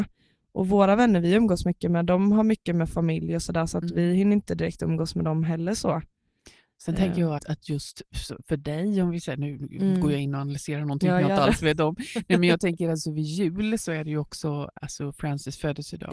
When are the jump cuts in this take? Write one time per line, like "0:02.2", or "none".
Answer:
0:07.4